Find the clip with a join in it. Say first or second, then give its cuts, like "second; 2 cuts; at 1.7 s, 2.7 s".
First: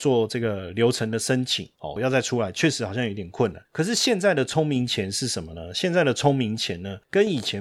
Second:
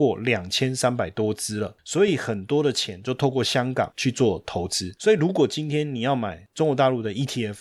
first; 1 cut; at 2.0 s